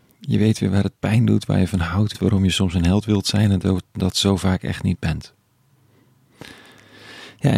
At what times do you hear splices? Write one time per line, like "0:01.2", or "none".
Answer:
0:02.1